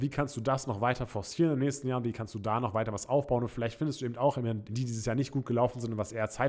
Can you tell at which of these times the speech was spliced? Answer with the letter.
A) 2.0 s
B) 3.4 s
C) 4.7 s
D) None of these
C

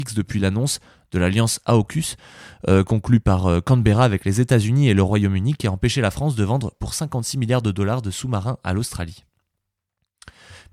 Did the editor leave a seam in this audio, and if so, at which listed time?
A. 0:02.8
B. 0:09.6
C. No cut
C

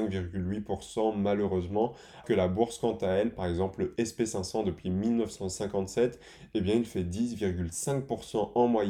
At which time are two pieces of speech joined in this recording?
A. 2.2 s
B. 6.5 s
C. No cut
A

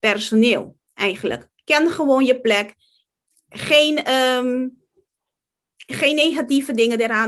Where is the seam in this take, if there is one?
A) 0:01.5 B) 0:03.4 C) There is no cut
C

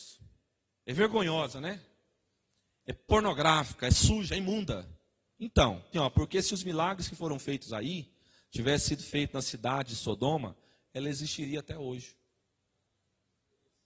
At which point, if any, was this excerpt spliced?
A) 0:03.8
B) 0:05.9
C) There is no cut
B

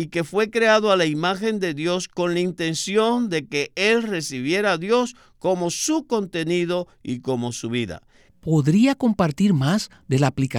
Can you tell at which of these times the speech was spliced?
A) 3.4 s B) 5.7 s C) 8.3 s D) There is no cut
C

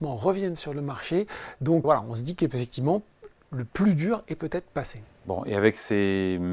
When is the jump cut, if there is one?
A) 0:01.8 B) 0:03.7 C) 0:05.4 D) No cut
A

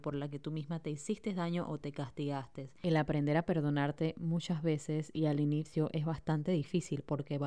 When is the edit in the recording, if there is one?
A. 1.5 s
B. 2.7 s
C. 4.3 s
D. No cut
D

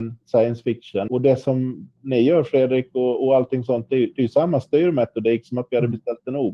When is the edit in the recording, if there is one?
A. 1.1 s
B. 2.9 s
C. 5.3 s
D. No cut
A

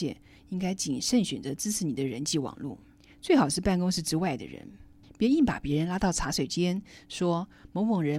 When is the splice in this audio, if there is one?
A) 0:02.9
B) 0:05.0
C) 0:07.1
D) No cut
B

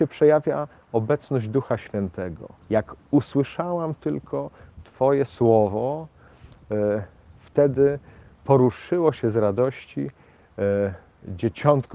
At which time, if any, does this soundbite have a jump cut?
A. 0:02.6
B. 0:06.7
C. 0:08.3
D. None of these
A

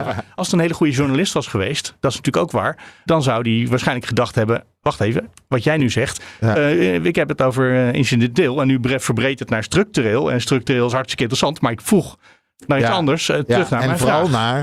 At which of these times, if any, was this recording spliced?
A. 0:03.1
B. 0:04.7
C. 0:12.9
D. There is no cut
A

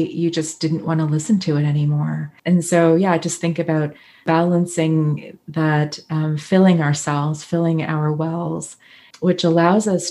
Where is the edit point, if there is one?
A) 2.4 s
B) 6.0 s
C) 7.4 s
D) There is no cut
A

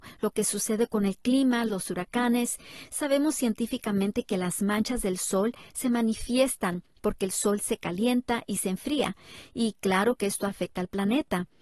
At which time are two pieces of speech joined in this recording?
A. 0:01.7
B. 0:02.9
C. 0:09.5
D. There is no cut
A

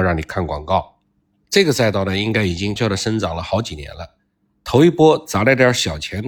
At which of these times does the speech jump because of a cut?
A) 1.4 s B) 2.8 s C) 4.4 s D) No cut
B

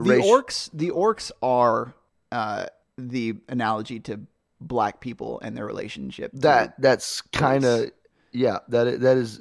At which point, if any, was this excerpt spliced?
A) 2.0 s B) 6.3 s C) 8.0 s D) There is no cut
D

